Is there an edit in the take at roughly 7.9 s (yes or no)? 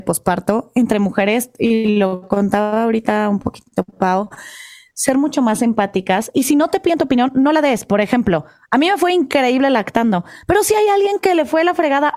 no